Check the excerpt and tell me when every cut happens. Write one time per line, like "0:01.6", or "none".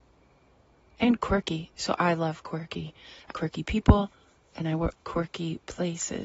0:03.3
0:04.9